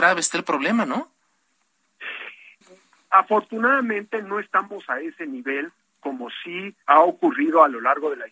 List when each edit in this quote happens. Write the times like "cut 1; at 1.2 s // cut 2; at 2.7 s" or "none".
cut 1; at 2.6 s // cut 2; at 6.8 s